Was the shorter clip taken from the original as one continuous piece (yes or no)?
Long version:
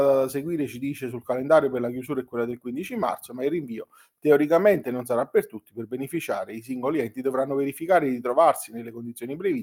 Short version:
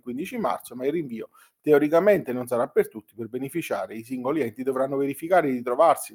yes